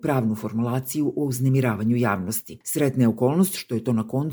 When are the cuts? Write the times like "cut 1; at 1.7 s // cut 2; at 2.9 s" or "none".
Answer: cut 1; at 2.6 s